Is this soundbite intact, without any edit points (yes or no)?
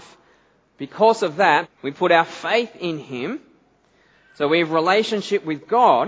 no